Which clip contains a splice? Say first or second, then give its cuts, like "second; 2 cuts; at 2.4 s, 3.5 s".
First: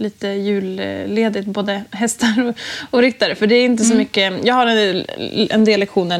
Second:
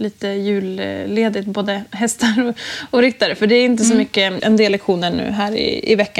second; 1 cut; at 4.4 s